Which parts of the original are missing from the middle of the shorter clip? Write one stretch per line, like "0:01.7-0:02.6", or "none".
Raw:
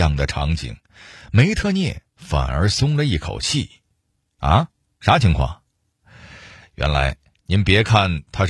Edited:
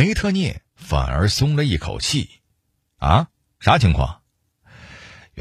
none

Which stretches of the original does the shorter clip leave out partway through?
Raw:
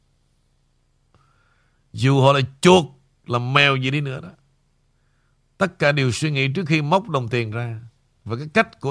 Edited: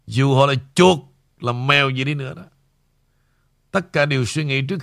none

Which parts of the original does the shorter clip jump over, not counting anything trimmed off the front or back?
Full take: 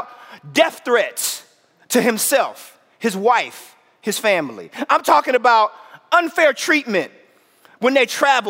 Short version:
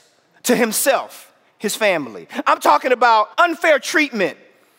0:03.0-0:03.9
0:05.8-0:06.1

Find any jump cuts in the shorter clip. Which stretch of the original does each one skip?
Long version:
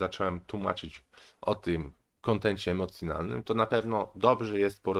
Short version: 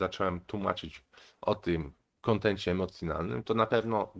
none

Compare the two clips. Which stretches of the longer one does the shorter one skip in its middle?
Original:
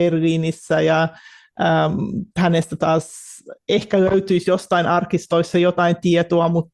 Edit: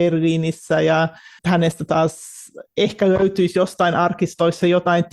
0:01.4-0:02.3

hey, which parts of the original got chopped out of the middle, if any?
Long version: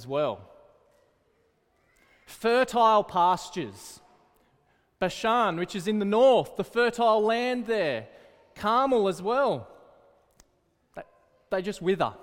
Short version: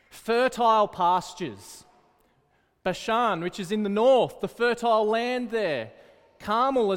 none

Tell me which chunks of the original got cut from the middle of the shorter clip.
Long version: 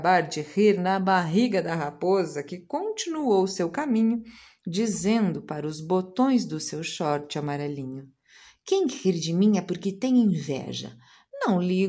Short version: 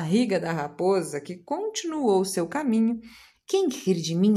0:04.6-0:08.5

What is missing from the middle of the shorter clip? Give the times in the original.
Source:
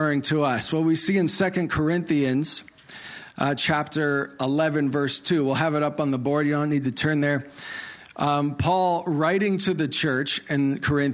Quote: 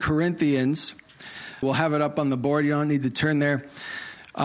0:03.3-0:05.4

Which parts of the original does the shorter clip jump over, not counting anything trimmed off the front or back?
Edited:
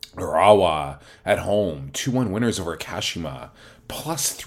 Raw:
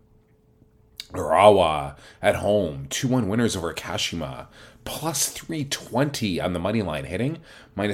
none

